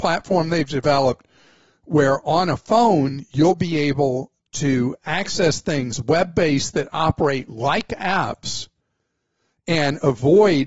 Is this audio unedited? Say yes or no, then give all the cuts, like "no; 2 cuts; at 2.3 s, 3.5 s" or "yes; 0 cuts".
yes; 0 cuts